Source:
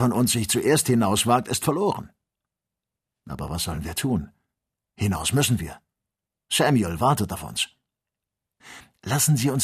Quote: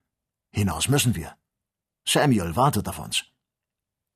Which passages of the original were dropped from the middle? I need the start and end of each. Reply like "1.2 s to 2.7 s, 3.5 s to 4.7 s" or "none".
none